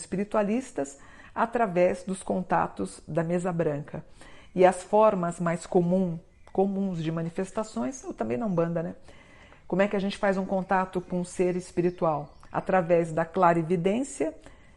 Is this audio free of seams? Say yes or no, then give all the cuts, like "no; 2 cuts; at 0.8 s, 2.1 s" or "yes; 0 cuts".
yes; 0 cuts